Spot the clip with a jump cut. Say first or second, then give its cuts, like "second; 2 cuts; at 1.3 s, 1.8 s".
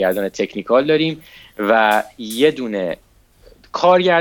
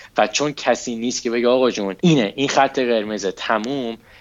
second; 1 cut; at 2.0 s